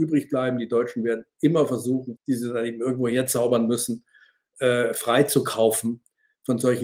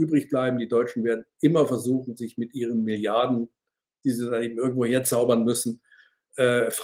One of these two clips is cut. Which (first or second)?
first